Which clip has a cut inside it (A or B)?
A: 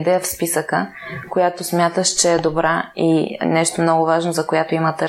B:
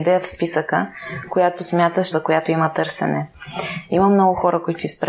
B